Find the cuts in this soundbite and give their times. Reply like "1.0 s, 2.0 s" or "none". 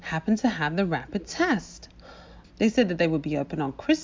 2.4 s